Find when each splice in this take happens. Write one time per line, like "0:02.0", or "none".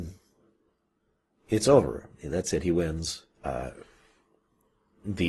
0:03.3